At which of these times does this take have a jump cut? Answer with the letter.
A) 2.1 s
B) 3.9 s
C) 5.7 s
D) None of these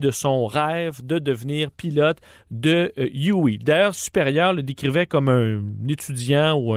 B